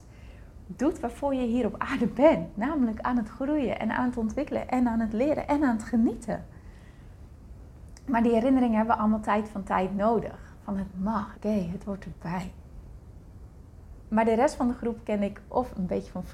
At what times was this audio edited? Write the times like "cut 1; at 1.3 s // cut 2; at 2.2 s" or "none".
cut 1; at 11.3 s // cut 2; at 14.0 s

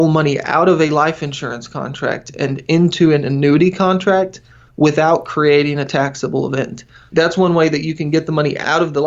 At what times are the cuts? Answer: none

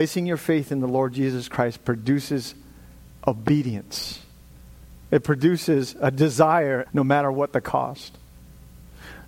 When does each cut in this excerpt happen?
cut 1; at 5.0 s // cut 2; at 6.9 s

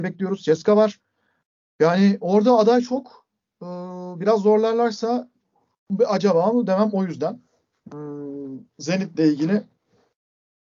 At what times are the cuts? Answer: none

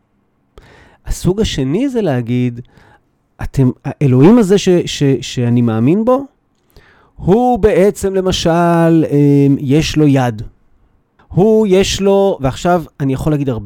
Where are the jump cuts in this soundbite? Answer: cut 1; at 11.2 s

